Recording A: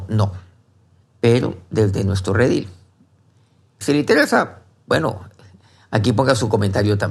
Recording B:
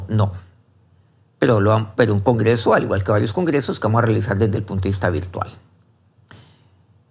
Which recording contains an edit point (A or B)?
A